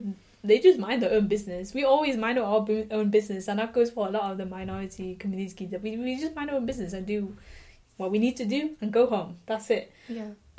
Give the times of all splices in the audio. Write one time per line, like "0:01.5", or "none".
none

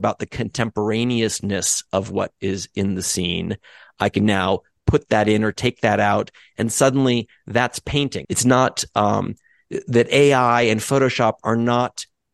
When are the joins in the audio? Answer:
0:08.2

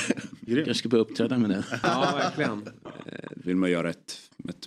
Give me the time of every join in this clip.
0:03.4

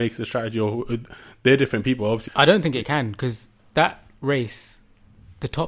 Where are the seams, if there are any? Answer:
0:02.3

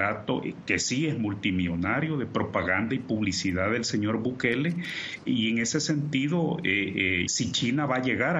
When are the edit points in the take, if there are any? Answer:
0:07.3

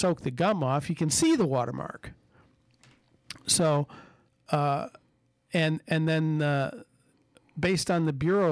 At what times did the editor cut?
none

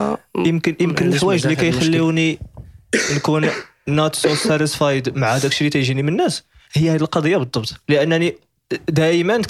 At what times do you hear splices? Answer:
0:07.8

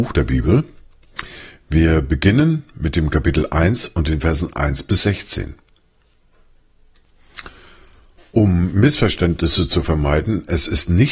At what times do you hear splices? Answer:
none

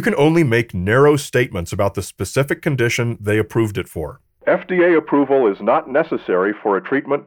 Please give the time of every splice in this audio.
0:04.4

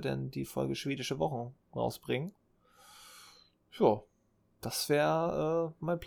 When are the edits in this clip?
none

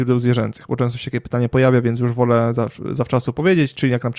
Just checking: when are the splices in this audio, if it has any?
none

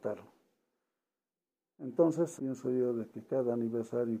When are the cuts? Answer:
0:02.4

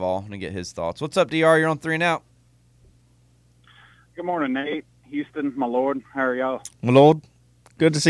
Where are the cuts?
none

